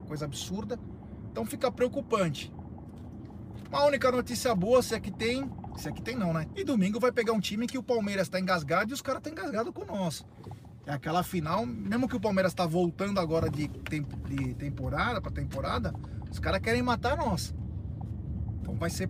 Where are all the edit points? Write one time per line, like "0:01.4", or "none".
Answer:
0:01.3
0:06.5